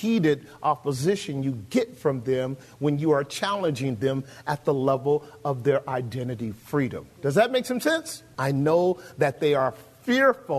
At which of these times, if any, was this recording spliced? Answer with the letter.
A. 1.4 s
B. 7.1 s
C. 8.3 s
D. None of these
C